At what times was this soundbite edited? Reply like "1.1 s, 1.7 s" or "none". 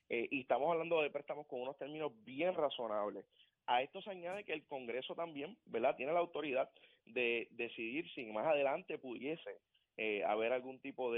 none